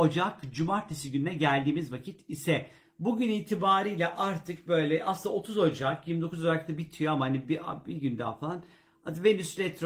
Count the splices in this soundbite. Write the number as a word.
zero